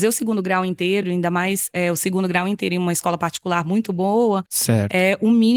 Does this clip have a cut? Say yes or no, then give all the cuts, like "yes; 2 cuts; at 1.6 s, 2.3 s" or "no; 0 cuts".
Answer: no; 0 cuts